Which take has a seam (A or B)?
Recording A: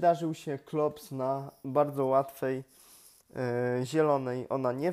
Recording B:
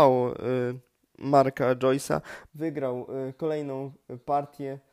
B